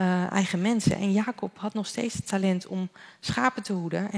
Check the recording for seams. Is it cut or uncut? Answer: uncut